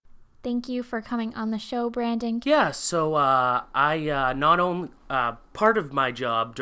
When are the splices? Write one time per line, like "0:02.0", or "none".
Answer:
0:02.4